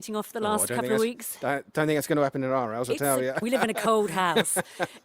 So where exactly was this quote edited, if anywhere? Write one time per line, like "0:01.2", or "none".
0:03.4

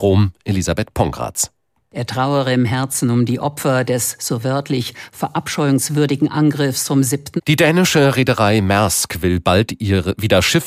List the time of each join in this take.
0:07.4

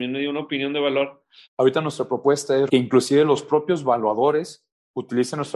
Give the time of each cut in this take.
0:01.4
0:02.7

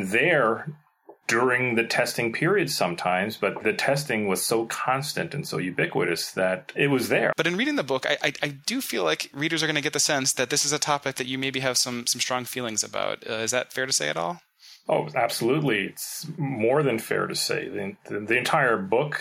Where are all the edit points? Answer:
0:07.3

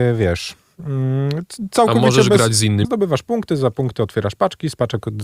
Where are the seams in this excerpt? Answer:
0:02.8

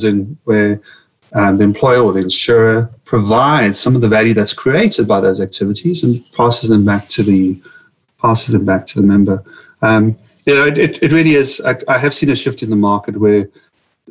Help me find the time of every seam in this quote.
none

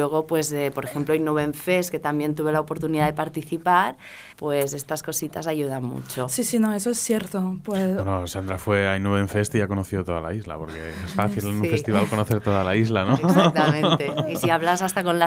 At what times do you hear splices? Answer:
0:04.3

